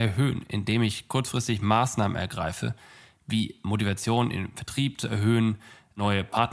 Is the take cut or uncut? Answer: uncut